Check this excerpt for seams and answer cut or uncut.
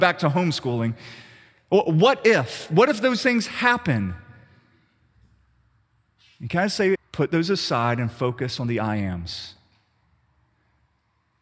cut